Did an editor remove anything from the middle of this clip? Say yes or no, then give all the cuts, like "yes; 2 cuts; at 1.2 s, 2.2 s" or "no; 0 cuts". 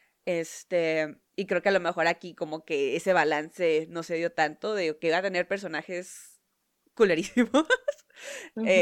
no; 0 cuts